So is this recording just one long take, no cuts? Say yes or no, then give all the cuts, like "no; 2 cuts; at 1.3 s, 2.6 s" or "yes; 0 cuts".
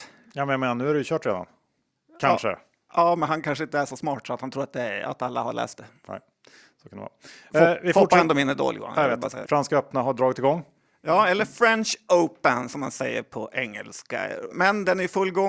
no; 2 cuts; at 9.4 s, 14.5 s